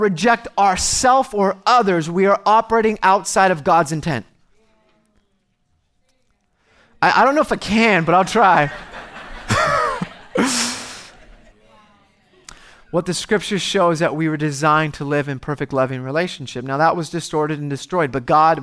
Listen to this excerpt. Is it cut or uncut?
cut